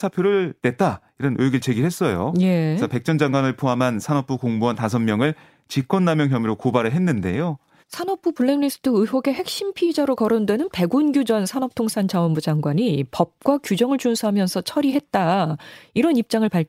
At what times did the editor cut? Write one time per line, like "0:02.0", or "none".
0:07.8